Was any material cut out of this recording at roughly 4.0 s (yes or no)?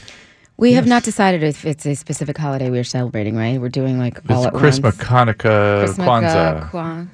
no